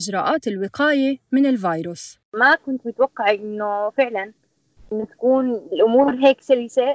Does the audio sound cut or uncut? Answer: cut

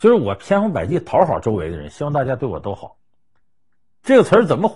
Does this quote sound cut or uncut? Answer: uncut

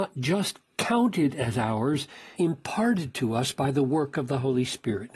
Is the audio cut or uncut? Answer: cut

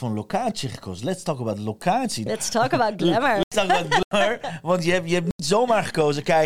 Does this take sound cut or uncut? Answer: cut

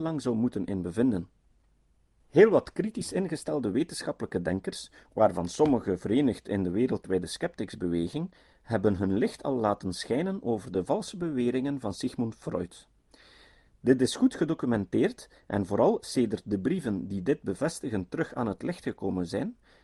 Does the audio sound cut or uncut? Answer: uncut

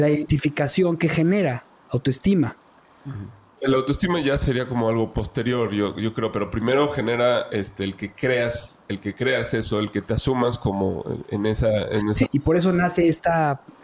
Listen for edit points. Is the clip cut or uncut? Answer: cut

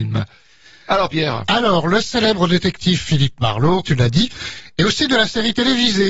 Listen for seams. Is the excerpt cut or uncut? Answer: cut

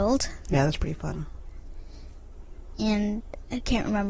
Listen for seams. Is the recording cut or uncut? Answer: uncut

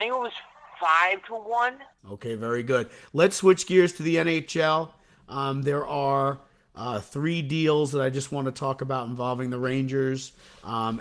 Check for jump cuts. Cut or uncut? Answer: cut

